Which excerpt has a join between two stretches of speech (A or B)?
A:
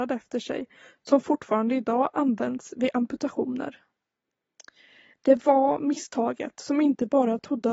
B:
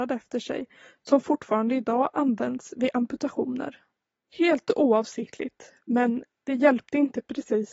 B